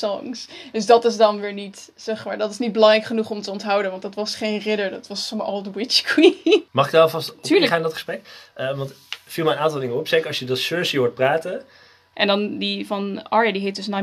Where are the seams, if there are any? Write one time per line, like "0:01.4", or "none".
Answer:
0:06.7
0:12.1